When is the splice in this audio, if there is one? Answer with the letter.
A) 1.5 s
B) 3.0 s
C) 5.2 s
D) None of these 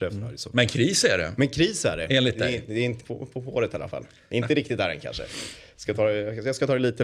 B